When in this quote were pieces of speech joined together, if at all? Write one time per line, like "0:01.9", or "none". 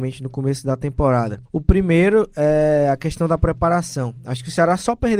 0:01.5